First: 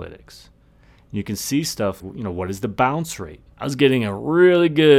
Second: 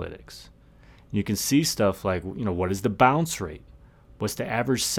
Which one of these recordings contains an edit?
first; 2 cuts; at 2.0 s, 3.5 s

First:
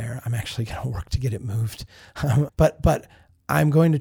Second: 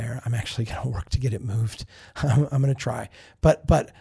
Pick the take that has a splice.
first; 1 cut; at 2.5 s

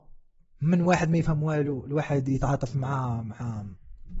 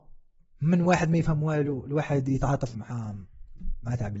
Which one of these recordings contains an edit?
second; 1 cut; at 2.7 s

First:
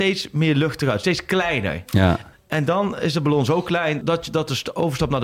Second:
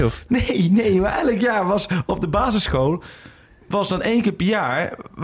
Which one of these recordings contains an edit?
first; 2 cuts; at 2.3 s, 4.0 s

